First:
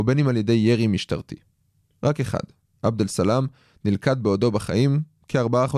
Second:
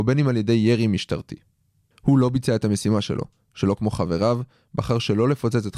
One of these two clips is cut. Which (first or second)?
second